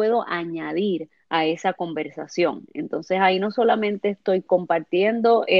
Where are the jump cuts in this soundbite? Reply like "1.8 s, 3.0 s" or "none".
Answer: none